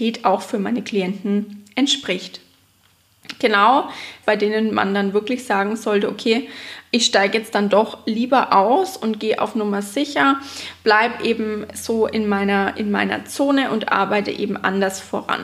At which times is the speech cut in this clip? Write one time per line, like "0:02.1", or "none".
0:04.2